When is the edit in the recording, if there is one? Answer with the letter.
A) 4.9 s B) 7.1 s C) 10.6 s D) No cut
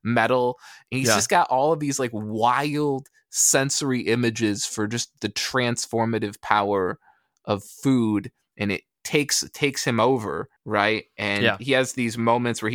C